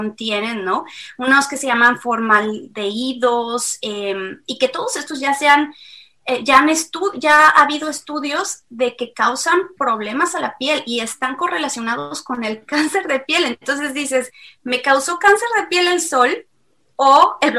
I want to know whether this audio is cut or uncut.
uncut